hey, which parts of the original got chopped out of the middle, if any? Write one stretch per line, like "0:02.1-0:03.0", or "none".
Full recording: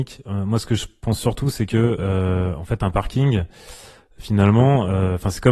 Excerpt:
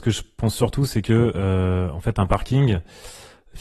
none